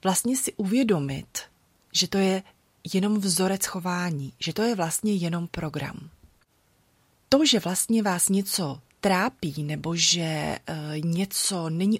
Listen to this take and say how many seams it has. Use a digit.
1